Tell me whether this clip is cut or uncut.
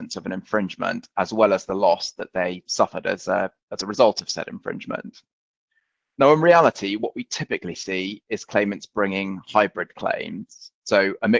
uncut